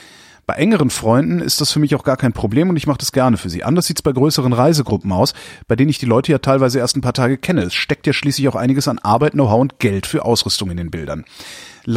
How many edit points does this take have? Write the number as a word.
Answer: zero